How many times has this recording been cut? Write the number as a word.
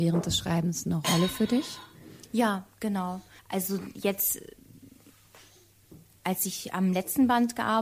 one